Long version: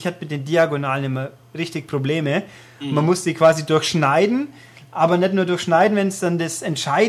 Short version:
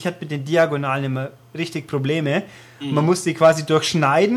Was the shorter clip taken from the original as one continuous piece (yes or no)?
yes